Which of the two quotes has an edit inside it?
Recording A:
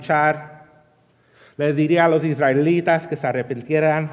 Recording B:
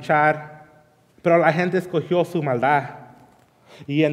B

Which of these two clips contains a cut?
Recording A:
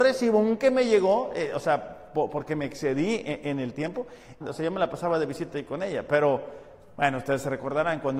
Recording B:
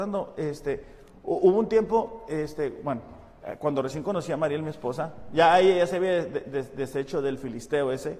A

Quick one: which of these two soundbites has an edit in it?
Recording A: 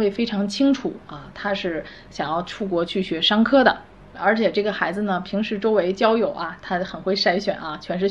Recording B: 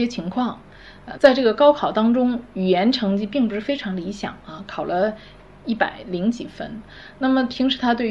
B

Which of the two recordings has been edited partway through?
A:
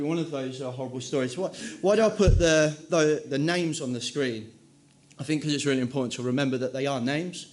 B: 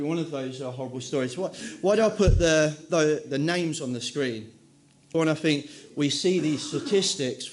B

